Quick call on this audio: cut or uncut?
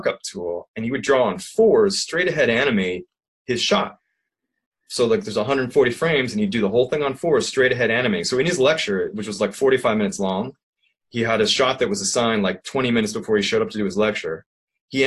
uncut